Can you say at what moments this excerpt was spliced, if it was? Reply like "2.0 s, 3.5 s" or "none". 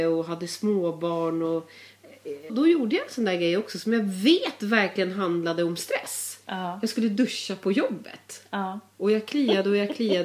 2.5 s, 8.9 s

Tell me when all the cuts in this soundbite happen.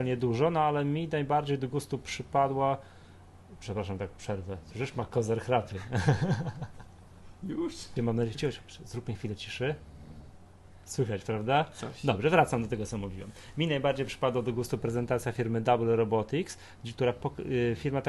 8.0 s

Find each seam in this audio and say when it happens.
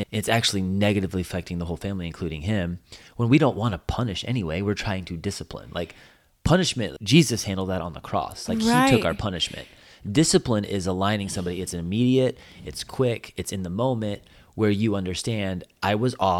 none

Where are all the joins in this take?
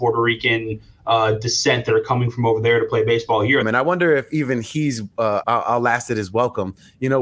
3.6 s, 5.4 s

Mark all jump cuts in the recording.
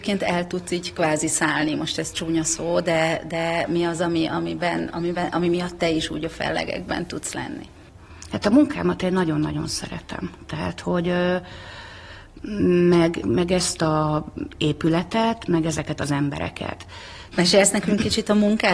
13.2 s, 17.3 s

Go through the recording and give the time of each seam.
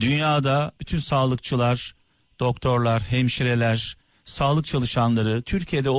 none

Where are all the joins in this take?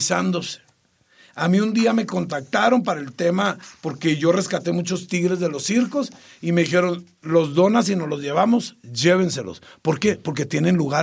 none

